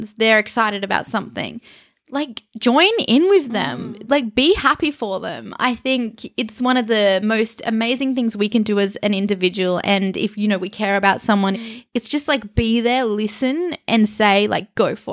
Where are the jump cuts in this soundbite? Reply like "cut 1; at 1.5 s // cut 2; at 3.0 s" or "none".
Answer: cut 1; at 11.5 s